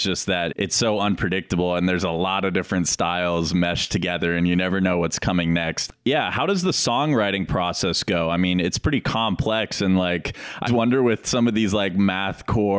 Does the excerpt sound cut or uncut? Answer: cut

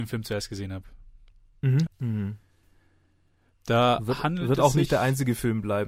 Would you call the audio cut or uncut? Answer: cut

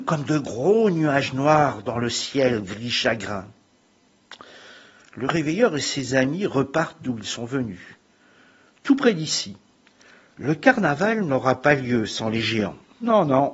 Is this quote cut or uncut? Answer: uncut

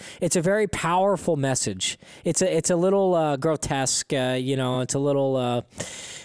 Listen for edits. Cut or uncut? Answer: uncut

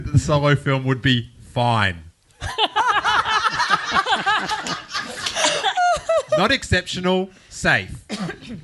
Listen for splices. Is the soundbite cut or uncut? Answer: uncut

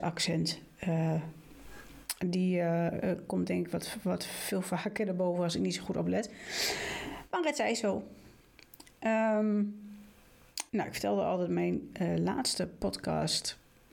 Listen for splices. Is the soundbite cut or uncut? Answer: cut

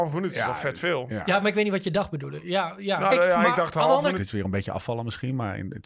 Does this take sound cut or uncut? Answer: cut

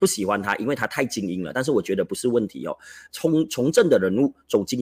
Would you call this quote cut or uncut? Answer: uncut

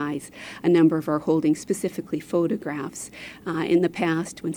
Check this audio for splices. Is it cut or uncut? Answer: uncut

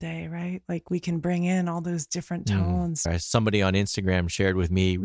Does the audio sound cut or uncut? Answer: cut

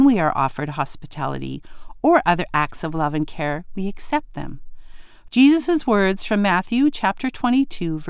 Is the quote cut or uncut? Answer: cut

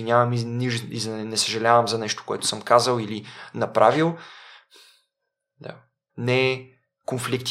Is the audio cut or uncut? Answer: cut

